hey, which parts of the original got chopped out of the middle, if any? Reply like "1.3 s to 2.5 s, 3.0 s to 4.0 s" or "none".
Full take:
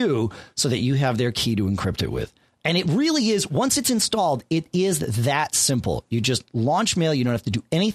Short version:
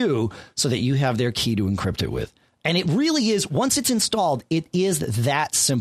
none